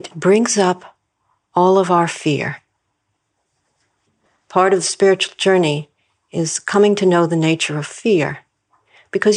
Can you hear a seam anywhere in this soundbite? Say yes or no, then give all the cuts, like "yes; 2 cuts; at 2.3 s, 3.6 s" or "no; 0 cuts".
no; 0 cuts